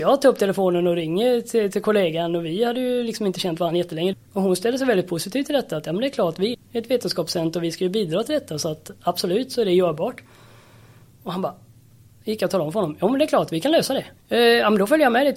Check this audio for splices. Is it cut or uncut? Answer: cut